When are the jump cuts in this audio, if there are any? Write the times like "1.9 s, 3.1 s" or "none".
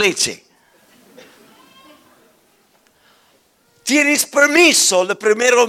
none

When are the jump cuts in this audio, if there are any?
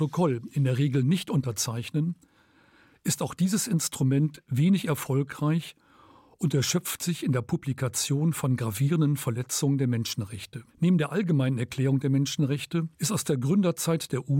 10.7 s, 12.9 s

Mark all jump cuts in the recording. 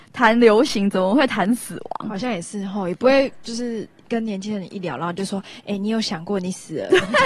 none

